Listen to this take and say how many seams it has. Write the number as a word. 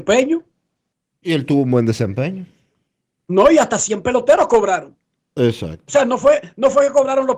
zero